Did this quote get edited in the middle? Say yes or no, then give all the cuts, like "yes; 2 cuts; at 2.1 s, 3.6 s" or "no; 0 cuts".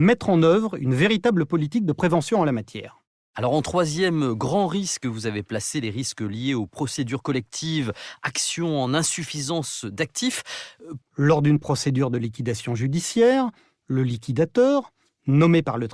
yes; 1 cut; at 11.0 s